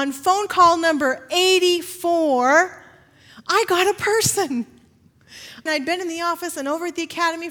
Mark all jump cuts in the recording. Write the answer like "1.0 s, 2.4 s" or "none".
5.7 s